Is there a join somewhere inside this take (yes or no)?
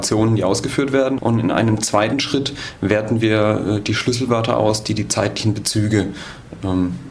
yes